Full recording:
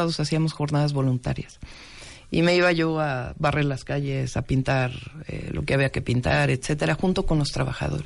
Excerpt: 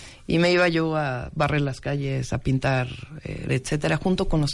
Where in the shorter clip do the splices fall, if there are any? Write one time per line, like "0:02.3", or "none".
0:03.5